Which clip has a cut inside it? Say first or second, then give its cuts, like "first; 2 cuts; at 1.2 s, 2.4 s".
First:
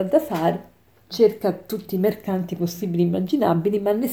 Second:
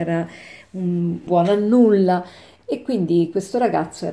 second; 1 cut; at 1.3 s